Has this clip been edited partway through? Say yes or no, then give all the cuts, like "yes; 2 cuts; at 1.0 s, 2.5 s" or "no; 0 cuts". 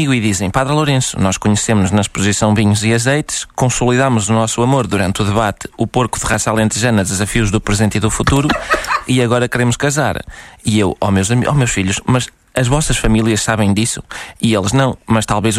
no; 0 cuts